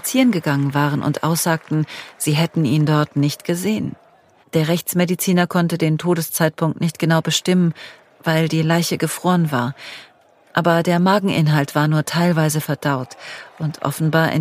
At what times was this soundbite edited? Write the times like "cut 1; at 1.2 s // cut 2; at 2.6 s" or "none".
cut 1; at 4.4 s